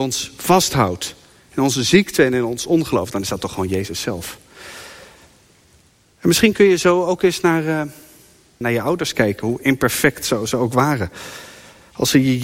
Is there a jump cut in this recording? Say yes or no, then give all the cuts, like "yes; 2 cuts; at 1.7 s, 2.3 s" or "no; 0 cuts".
yes; 1 cut; at 8.6 s